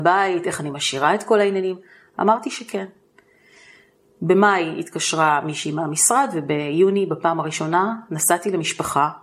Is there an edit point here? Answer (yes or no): no